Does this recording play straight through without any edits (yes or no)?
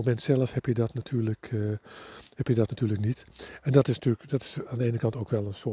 no